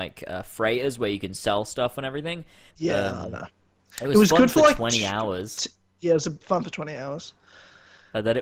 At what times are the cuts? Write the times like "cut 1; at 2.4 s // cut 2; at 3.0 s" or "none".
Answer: cut 1; at 2.7 s